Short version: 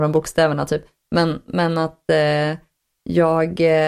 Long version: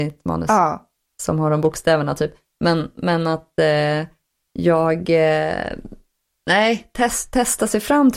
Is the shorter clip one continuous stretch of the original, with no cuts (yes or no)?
yes